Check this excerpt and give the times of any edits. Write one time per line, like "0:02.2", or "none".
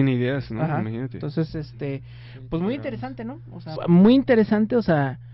0:03.8